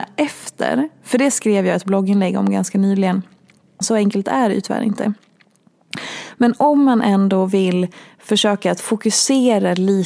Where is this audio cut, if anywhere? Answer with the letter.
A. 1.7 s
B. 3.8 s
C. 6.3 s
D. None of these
B